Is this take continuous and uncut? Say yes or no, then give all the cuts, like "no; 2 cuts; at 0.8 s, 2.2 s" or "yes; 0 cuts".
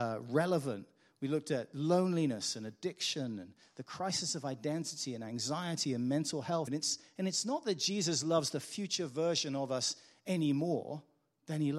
no; 1 cut; at 6.7 s